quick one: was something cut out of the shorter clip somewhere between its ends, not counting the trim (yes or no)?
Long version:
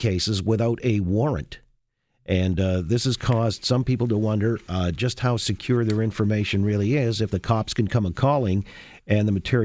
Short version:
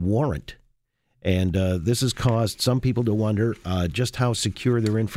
no